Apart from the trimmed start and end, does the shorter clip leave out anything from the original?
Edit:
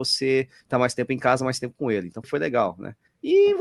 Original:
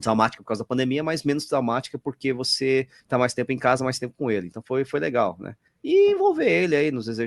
yes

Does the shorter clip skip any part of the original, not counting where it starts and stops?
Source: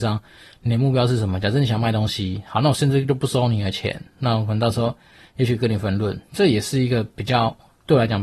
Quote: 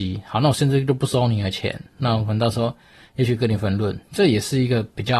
no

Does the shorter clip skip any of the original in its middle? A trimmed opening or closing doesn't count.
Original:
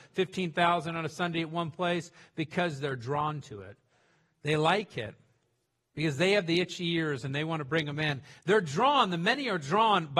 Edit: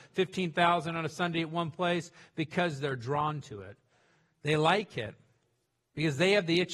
no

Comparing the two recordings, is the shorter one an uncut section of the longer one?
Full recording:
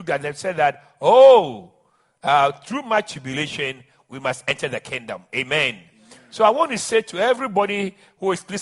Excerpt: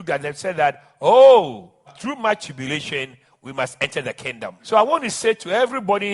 no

